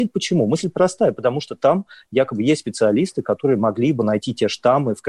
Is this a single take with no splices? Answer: yes; 0 cuts

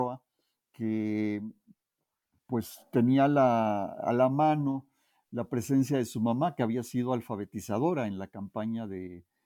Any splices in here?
no; 0 cuts

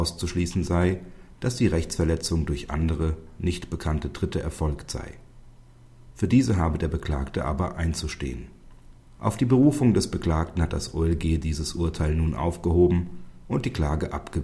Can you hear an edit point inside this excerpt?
no; 0 cuts

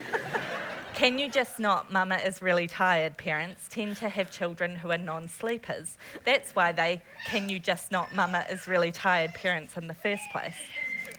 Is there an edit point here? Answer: no; 0 cuts

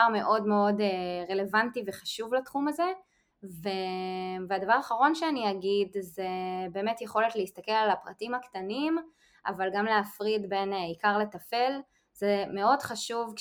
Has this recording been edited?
no; 0 cuts

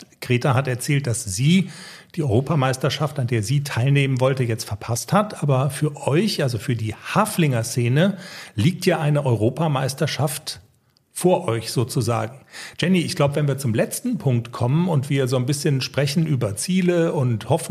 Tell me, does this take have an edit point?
no; 0 cuts

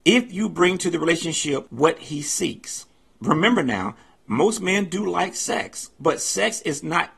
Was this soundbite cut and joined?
no; 0 cuts

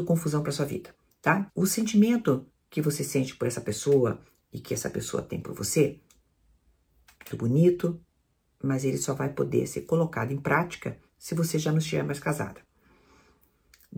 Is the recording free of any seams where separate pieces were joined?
no; 2 cuts; at 1.5 s, 7.3 s

